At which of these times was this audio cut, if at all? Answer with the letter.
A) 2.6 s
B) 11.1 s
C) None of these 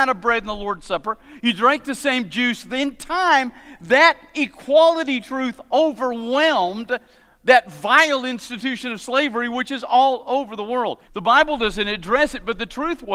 B